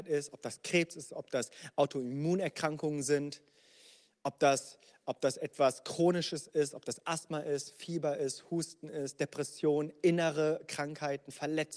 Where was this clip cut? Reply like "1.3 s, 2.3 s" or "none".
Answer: none